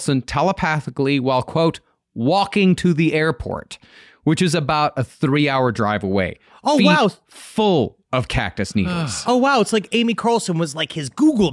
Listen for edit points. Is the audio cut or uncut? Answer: uncut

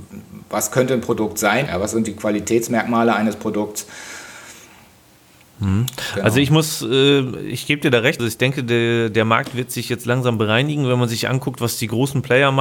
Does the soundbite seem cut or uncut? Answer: cut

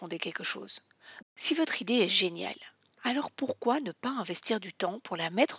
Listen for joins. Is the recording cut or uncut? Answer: cut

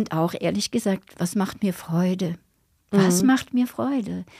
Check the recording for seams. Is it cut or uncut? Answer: uncut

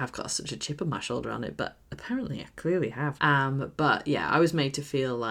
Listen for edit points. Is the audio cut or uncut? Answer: cut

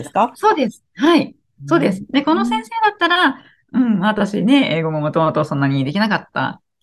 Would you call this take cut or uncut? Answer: uncut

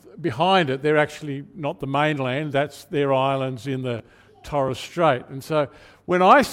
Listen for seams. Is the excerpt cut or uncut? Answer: uncut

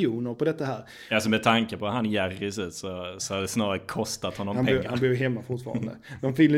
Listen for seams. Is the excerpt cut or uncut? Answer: uncut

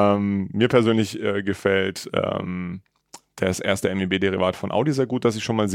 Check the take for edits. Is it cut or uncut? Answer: uncut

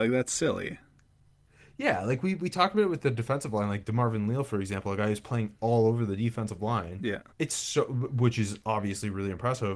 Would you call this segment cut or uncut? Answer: cut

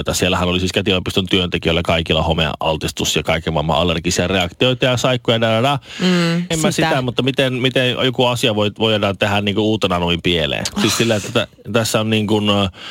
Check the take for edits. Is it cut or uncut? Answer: cut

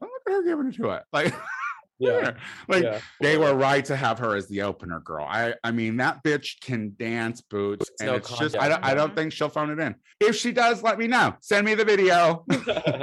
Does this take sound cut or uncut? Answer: cut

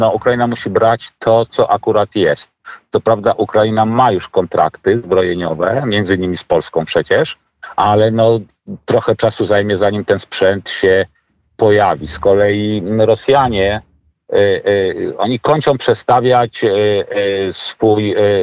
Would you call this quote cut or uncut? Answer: uncut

